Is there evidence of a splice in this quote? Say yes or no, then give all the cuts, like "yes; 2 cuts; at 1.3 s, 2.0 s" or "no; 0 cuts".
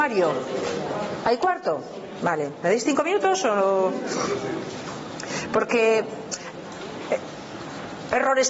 no; 0 cuts